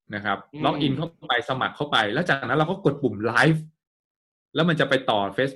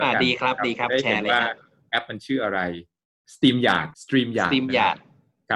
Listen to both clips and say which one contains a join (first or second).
second